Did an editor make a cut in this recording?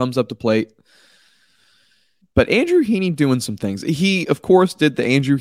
yes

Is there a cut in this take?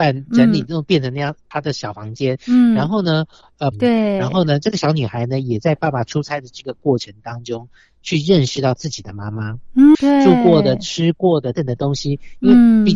yes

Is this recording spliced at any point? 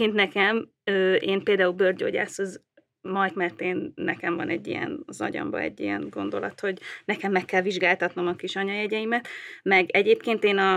yes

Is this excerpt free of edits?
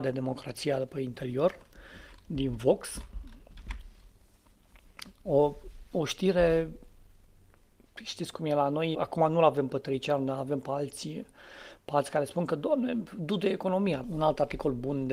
no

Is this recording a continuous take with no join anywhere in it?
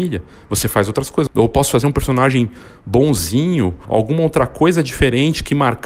no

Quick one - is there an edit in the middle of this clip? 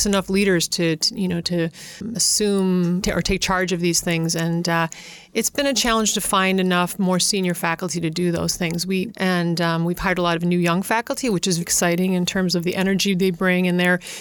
yes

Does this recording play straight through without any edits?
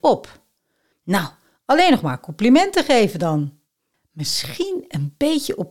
no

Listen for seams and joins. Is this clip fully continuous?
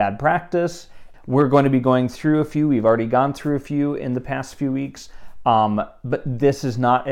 no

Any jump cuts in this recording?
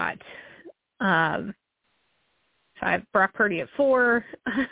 yes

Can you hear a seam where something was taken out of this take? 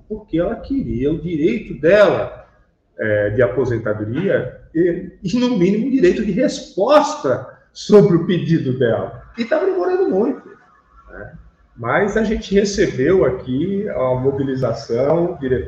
yes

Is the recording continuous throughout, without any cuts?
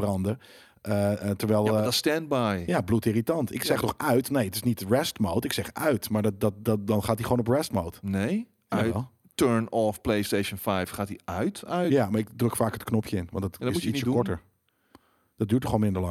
yes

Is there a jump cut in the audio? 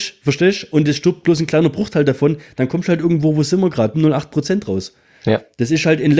yes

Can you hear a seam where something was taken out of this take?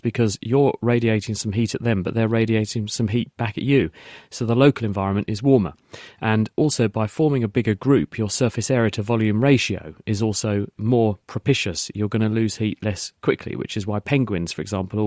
no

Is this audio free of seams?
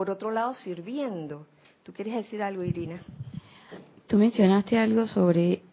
no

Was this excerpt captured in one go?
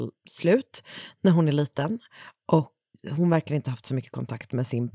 no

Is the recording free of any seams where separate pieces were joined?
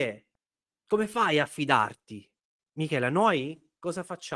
yes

